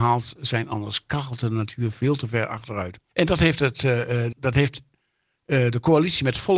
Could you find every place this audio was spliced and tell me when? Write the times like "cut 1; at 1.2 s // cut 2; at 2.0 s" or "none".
cut 1; at 3.1 s // cut 2; at 4.3 s